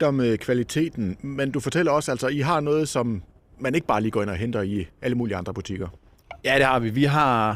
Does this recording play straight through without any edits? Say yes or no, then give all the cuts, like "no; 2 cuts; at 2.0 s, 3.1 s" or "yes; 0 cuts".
yes; 0 cuts